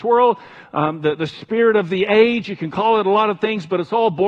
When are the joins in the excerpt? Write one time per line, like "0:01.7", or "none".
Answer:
none